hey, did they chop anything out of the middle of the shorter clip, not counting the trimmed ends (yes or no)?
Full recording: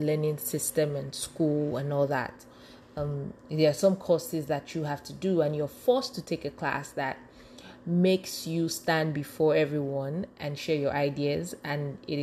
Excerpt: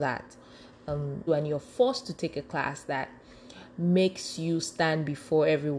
yes